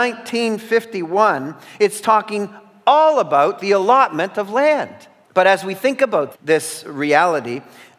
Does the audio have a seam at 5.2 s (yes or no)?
yes